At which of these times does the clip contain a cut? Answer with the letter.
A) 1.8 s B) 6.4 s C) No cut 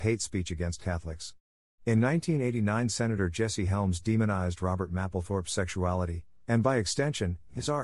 A